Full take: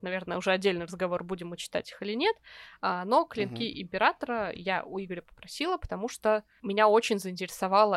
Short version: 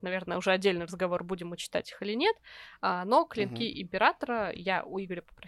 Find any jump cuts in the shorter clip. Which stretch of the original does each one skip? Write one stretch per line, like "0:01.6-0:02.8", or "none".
none